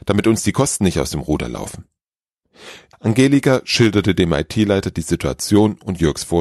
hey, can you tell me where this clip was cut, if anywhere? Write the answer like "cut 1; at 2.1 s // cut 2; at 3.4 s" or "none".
cut 1; at 2.9 s